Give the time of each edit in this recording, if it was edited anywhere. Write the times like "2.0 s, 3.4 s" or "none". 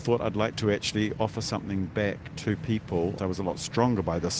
3.2 s

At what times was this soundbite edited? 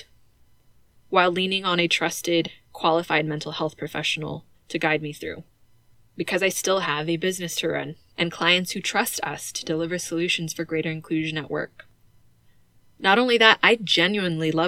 8.1 s

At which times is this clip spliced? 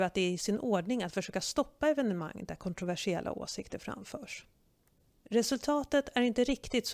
none

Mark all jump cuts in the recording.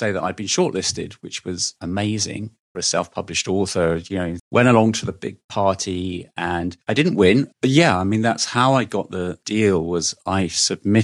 4.4 s, 7.5 s

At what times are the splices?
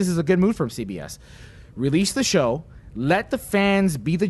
none

